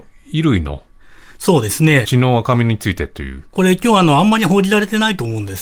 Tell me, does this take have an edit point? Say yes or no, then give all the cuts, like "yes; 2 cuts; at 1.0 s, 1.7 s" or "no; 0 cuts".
yes; 1 cut; at 2.0 s